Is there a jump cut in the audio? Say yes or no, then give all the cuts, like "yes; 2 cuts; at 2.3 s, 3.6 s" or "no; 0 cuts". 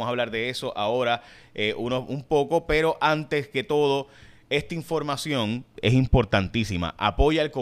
no; 0 cuts